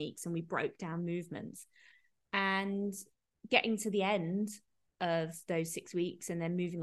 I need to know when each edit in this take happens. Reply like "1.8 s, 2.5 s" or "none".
none